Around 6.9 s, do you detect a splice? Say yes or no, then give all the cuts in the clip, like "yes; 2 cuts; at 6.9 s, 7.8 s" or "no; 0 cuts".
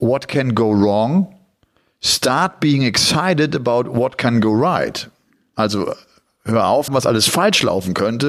yes; 1 cut; at 6.9 s